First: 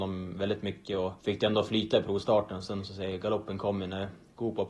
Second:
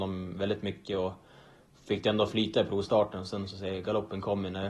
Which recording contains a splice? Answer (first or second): first